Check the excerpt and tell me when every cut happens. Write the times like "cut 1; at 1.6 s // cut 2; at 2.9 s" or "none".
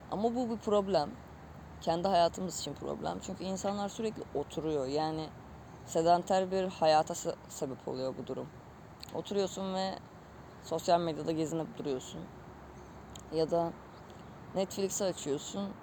none